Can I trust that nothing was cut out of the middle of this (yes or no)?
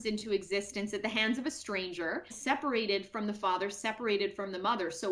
no